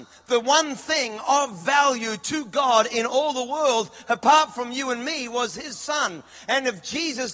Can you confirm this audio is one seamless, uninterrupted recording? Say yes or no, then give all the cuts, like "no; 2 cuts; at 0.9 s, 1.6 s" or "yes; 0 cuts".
yes; 0 cuts